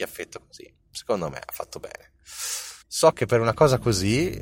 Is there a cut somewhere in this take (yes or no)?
yes